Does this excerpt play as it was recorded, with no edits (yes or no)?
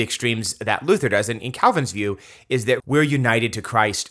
no